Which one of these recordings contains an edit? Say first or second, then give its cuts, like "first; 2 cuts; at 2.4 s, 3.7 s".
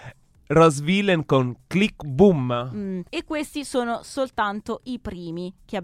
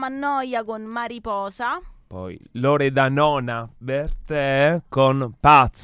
first; 1 cut; at 3.1 s